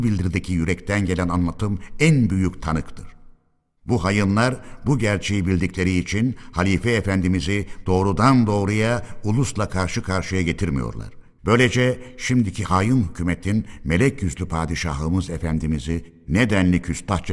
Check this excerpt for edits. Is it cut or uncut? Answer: cut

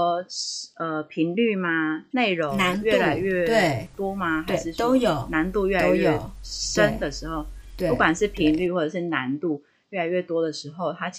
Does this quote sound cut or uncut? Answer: cut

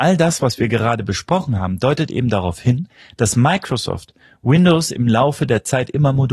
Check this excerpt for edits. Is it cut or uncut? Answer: uncut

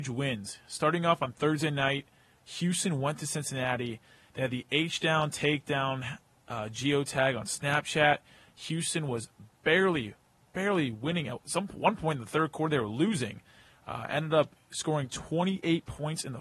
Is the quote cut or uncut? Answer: uncut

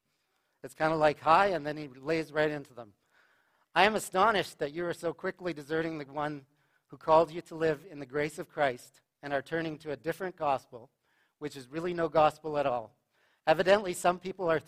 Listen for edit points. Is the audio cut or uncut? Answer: uncut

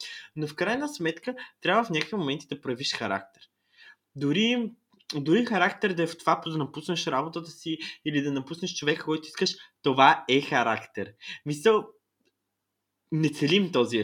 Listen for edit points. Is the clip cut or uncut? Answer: cut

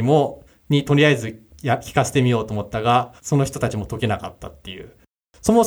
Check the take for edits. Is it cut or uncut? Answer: cut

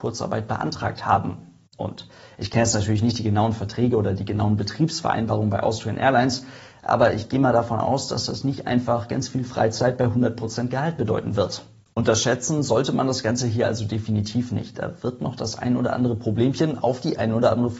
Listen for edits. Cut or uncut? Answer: uncut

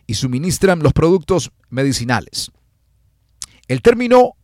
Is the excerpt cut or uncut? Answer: cut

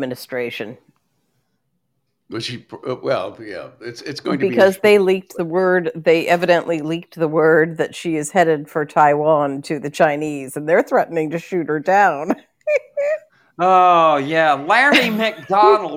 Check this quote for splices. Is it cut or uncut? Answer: uncut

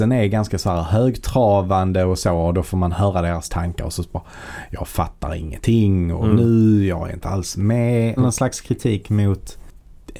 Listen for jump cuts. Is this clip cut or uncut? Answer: cut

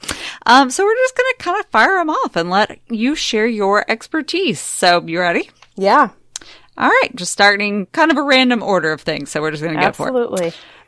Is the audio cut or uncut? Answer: uncut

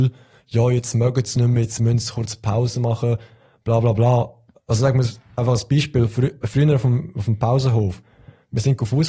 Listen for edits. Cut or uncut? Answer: uncut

